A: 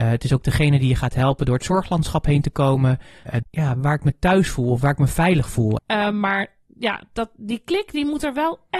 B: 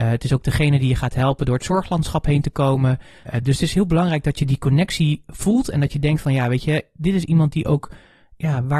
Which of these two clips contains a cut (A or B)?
A